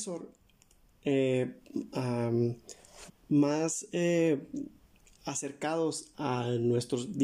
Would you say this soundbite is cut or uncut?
cut